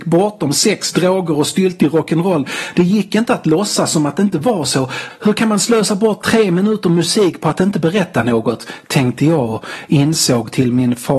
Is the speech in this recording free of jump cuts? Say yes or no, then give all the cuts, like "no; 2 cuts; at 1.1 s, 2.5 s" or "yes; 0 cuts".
yes; 0 cuts